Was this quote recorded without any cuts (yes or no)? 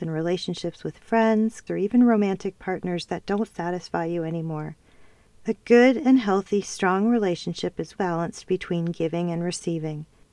no